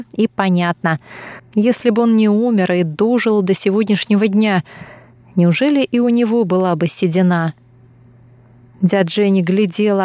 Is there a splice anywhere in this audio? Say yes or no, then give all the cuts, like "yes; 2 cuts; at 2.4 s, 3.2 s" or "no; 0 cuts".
yes; 1 cut; at 1.4 s